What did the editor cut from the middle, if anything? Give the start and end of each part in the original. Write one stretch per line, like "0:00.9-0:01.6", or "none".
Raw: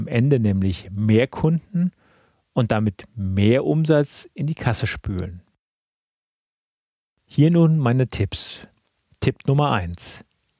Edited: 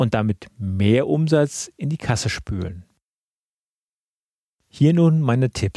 none

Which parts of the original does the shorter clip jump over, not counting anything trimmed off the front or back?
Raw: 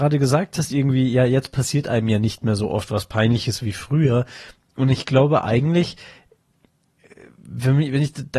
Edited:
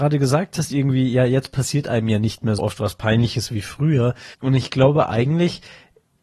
0:02.6-0:02.7
0:04.4-0:04.7

